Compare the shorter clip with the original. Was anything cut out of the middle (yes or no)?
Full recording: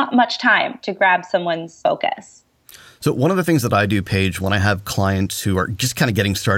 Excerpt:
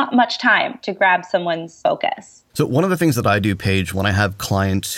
yes